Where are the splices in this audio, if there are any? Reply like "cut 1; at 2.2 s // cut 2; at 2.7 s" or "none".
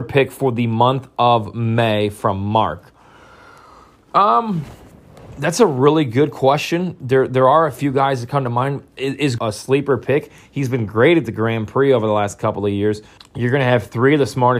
cut 1; at 9.4 s // cut 2; at 13.2 s

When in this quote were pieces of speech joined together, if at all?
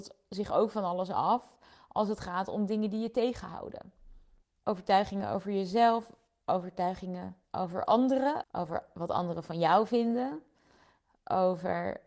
cut 1; at 4.4 s // cut 2; at 8.4 s

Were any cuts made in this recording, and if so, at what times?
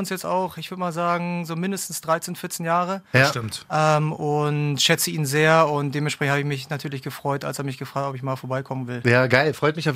none

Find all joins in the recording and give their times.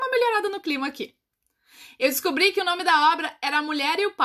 none

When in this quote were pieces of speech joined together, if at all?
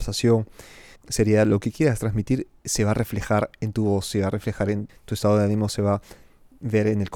cut 1; at 1.0 s // cut 2; at 4.9 s

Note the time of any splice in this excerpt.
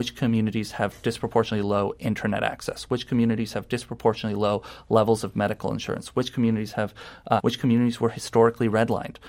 cut 1; at 7.4 s

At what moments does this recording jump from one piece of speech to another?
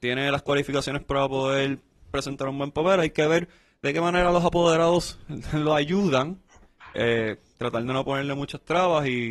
none

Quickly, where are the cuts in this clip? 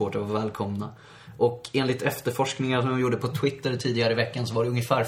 none

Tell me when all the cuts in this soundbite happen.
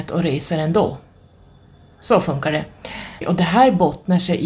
cut 1; at 1.9 s // cut 2; at 3.2 s

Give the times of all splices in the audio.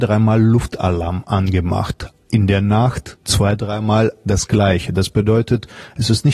none

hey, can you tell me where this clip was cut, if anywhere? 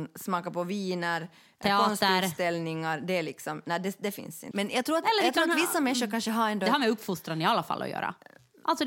cut 1; at 4.5 s

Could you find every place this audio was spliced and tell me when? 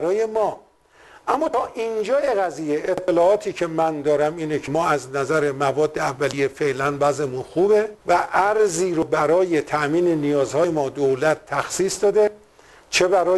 cut 1; at 8.0 s

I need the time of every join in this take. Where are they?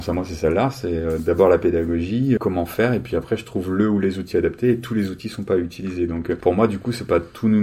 cut 1; at 2.4 s

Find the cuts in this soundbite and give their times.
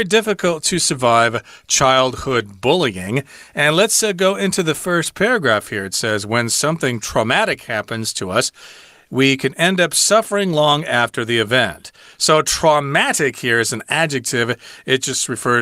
none

